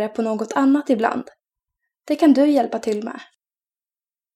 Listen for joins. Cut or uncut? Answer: uncut